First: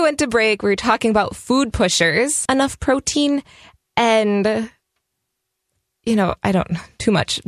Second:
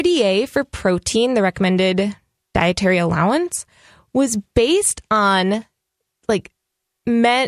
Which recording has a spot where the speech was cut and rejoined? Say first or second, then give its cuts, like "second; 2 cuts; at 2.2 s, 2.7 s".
first; 1 cut; at 2.5 s